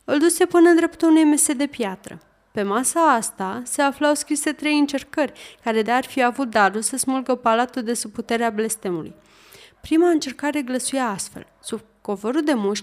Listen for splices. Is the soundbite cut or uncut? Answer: cut